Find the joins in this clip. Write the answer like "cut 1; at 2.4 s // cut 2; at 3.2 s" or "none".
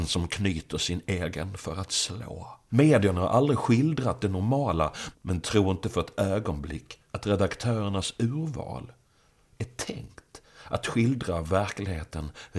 cut 1; at 2.7 s // cut 2; at 5.1 s // cut 3; at 7.1 s